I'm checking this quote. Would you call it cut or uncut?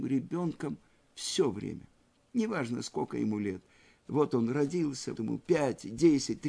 cut